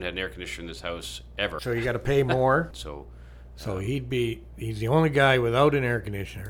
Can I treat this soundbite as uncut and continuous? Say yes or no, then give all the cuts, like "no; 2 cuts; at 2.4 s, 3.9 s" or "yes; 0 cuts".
no; 2 cuts; at 1.6 s, 2.7 s